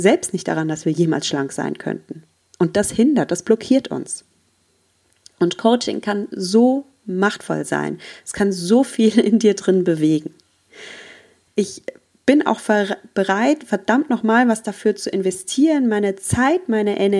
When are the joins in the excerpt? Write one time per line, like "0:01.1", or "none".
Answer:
0:11.5